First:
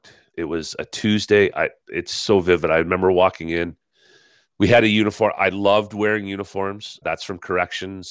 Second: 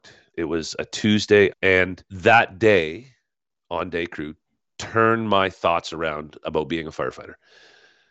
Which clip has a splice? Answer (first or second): second